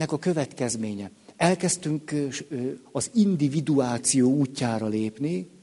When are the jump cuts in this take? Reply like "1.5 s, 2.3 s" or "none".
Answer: none